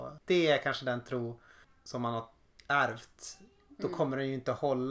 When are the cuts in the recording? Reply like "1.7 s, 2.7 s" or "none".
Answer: none